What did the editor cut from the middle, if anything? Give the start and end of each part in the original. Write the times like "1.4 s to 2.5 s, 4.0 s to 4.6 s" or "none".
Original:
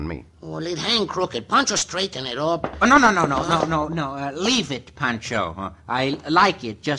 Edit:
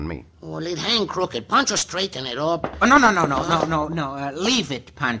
none